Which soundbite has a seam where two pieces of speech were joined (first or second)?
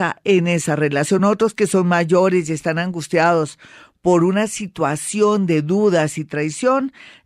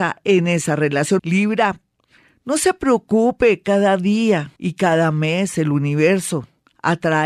second